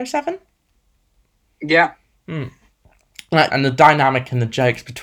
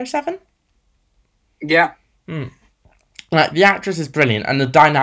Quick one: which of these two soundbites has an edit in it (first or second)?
first